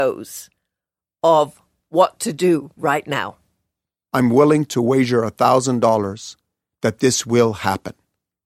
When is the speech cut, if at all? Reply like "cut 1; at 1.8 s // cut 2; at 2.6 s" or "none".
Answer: cut 1; at 4.1 s